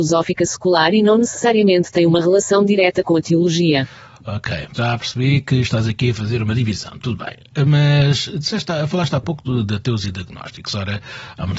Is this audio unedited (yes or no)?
no